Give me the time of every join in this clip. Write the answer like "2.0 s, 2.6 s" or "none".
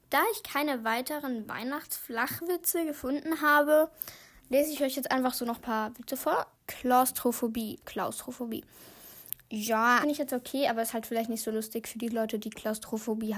6.5 s, 7.8 s, 10.0 s